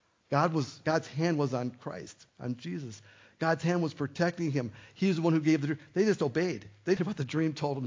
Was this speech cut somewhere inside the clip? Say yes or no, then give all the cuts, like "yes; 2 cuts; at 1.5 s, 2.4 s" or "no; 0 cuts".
yes; 1 cut; at 7.0 s